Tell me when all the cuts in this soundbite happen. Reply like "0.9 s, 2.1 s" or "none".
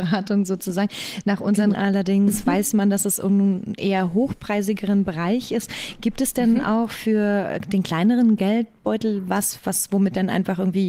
1.7 s